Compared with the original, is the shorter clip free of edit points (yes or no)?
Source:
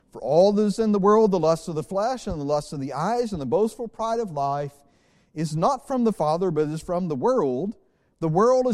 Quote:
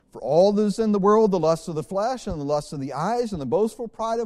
yes